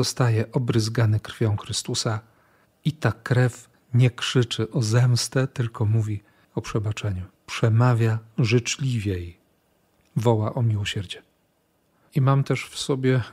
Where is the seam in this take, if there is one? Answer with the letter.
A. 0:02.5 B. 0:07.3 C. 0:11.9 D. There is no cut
B